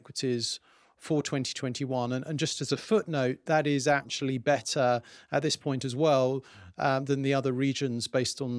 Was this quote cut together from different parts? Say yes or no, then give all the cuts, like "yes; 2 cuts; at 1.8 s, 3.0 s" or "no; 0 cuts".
no; 0 cuts